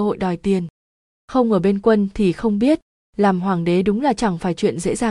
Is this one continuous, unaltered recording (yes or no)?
yes